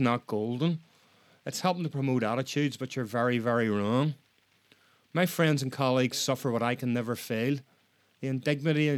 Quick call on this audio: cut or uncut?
uncut